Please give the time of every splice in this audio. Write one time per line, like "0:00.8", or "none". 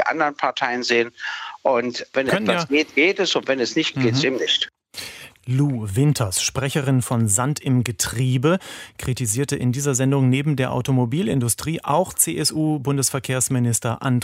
0:03.9
0:05.4